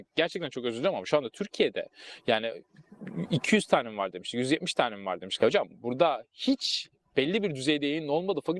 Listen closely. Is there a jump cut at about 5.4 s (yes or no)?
yes